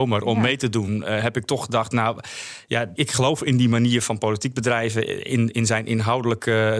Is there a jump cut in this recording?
yes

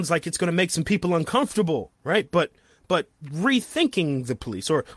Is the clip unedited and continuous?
no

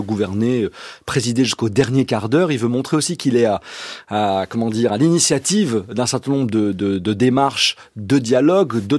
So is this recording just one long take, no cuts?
yes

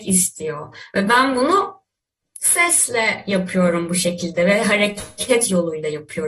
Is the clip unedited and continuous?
yes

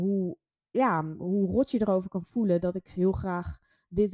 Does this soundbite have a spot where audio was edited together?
no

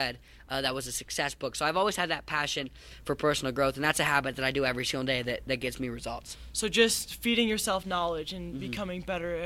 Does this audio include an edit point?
no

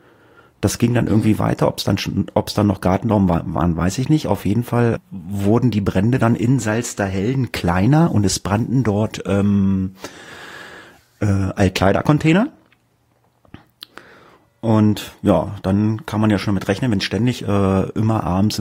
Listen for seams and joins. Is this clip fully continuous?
no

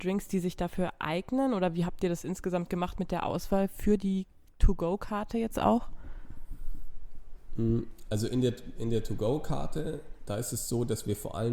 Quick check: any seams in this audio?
no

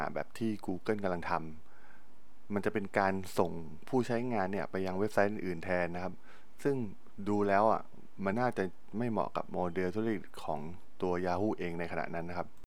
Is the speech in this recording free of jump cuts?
no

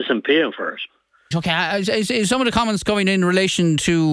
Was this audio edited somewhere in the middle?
yes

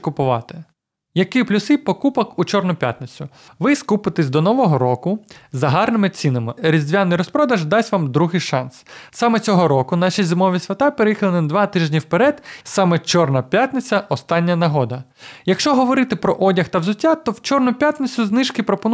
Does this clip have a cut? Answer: yes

